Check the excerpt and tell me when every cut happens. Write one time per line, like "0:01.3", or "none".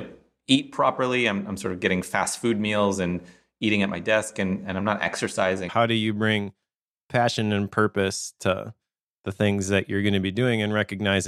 0:05.7